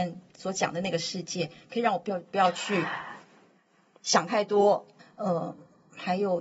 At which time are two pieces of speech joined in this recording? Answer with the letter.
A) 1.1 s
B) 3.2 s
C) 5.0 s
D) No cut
C